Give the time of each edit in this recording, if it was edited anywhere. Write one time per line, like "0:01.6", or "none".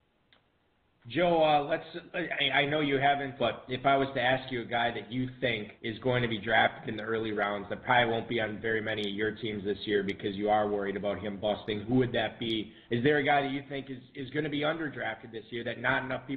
0:03.4
0:05.8
0:12.8